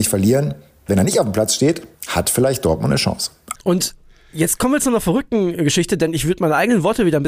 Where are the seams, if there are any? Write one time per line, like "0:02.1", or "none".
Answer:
0:01.9
0:03.5